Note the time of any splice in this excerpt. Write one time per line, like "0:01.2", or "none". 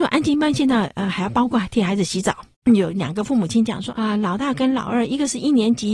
0:02.6
0:03.9

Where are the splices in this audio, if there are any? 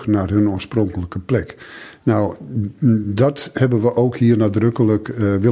none

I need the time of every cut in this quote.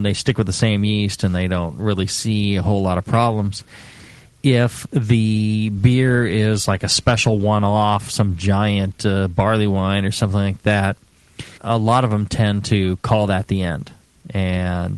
0:11.6

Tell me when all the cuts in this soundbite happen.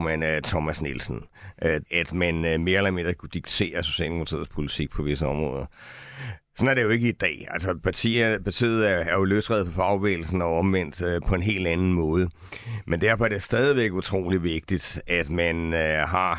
0:01.8
0:07.8

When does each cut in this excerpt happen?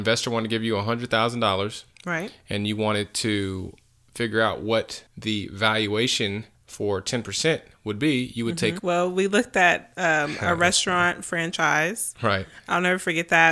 0:08.8

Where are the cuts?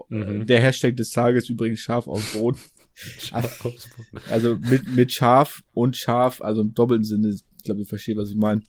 none

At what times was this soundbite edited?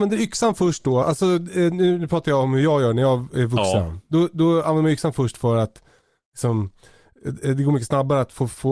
none

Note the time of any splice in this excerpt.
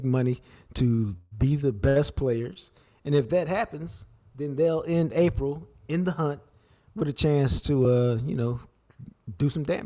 none

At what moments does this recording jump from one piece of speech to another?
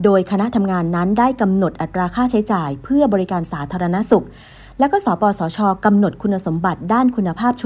none

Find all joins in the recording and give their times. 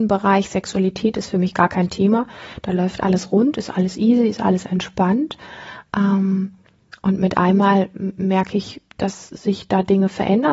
none

